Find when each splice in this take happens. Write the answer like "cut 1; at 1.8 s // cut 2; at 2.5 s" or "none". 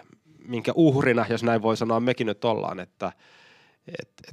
none